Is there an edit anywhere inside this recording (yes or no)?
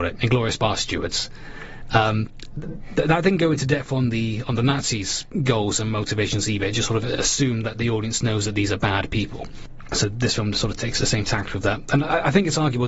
no